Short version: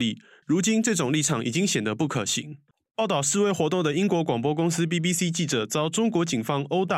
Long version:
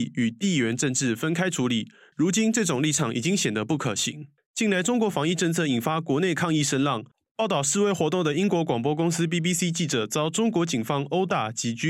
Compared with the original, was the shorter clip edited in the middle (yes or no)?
yes